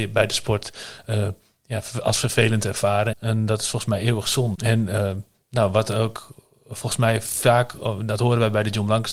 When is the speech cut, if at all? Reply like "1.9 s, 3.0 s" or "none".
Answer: 3.1 s, 4.5 s